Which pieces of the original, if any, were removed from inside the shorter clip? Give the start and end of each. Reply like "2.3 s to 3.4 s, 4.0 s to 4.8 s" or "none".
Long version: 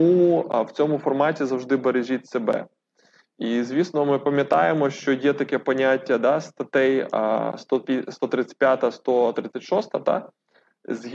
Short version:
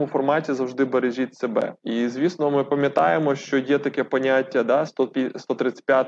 2.7 s to 3.3 s, 6.4 s to 7.6 s